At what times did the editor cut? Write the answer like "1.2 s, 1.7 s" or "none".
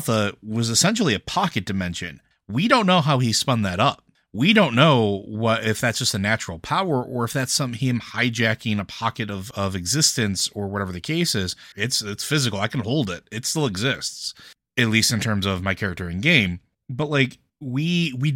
9.5 s, 11.7 s

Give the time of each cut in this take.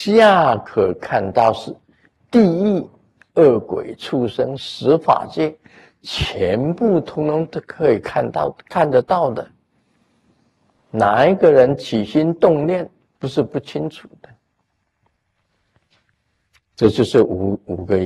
10.8 s, 13.2 s

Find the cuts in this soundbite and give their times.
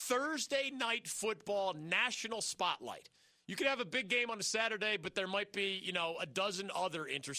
none

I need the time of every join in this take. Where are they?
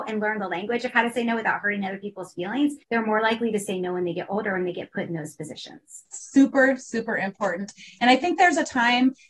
2.8 s

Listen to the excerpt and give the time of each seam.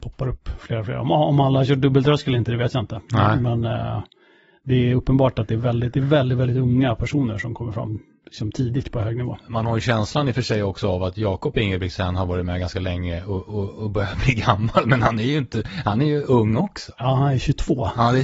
none

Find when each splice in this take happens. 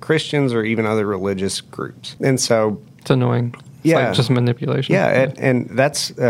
2.2 s

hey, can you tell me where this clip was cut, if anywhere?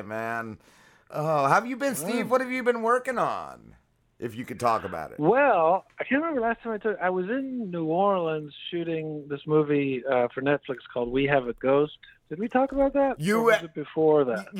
none

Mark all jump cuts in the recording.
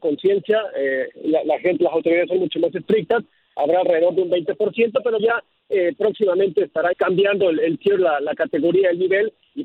5.2 s, 6.9 s

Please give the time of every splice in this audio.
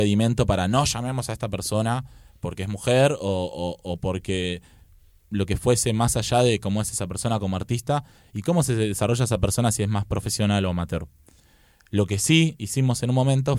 none

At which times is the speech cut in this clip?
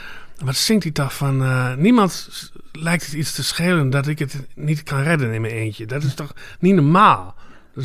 none

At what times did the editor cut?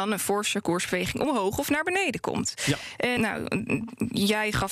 3.2 s

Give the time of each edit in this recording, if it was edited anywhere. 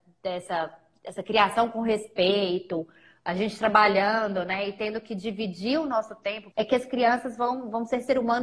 6.5 s

